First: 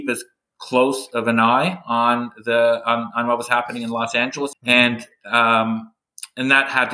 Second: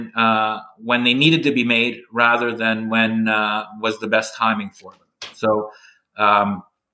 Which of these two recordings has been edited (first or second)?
first